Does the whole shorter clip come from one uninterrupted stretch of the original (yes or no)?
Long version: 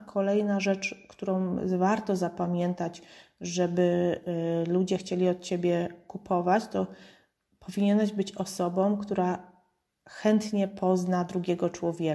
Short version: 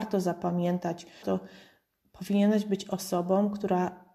no